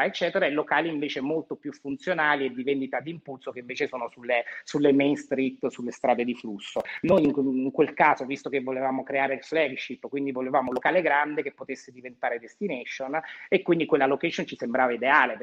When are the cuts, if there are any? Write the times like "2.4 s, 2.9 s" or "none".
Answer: none